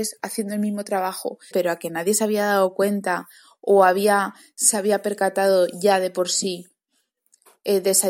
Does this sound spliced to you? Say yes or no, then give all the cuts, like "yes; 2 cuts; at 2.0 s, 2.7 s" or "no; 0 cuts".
yes; 1 cut; at 1.5 s